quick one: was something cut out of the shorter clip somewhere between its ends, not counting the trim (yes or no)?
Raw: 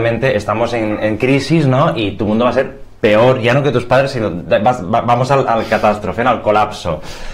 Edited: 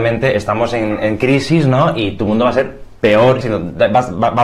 yes